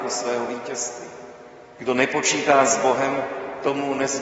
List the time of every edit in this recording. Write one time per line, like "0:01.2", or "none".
0:01.8